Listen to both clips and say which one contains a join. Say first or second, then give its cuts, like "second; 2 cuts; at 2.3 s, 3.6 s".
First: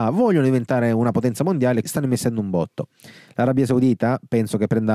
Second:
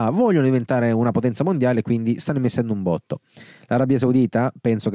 first; 1 cut; at 1.8 s